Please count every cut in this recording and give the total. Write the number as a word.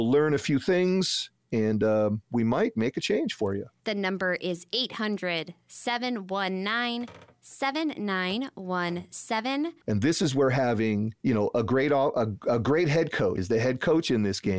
two